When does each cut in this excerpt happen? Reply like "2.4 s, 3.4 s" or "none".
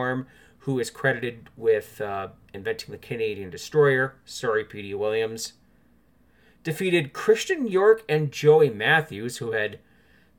none

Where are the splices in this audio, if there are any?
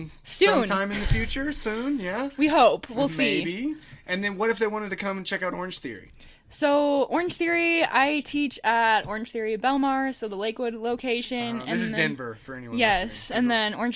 none

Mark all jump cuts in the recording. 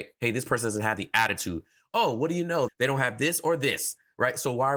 2.7 s

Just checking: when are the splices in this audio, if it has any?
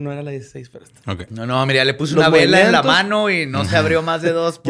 1.3 s

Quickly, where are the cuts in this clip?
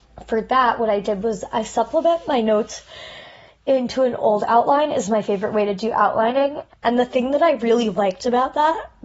6.7 s

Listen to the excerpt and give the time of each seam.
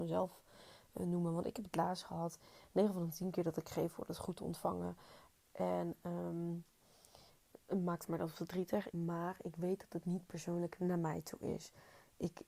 5.4 s, 8.9 s

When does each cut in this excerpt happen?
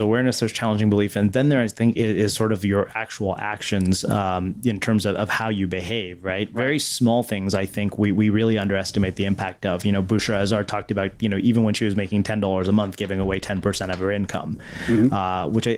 none

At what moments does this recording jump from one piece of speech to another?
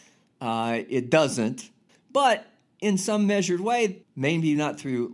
1.9 s, 4.0 s

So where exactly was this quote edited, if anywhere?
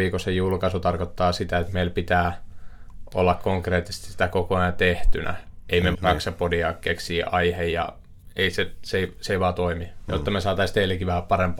5.9 s

